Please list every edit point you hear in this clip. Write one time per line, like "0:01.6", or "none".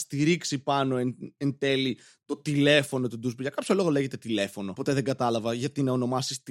none